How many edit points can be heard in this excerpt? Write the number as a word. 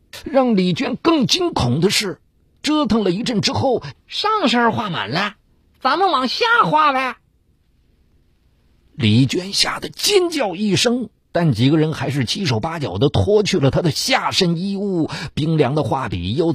one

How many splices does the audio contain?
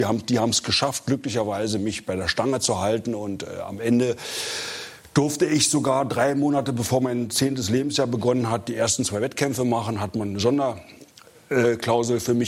zero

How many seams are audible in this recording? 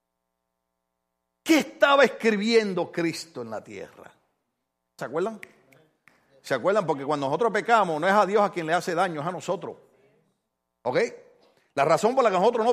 one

